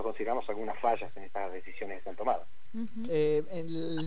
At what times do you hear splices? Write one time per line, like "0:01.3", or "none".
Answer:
0:03.1